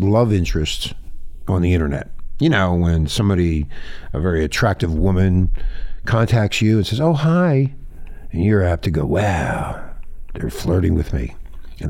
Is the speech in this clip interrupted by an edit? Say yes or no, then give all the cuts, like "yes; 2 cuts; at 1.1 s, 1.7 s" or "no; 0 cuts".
no; 0 cuts